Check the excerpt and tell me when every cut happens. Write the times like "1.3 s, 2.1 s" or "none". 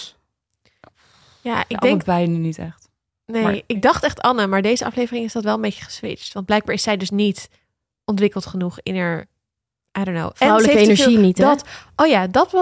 none